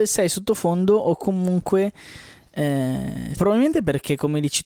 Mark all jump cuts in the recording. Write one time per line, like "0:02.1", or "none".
0:03.3